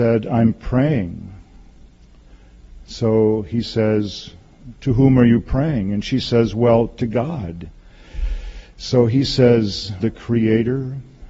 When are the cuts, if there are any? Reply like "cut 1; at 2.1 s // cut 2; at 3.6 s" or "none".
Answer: cut 1; at 10.0 s